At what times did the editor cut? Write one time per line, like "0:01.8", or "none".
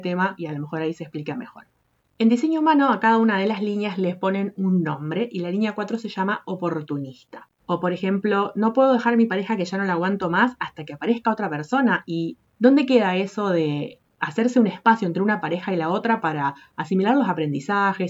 0:07.6

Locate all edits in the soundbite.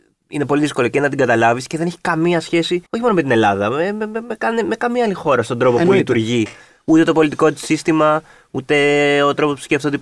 0:02.9

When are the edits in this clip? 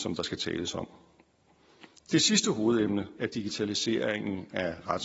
0:03.2

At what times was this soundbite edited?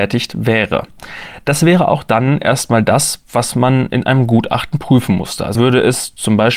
0:05.5

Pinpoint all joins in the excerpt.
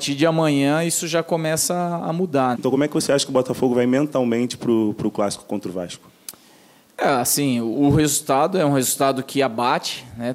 0:02.5

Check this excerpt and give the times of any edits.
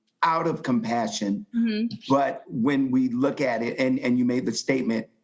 none

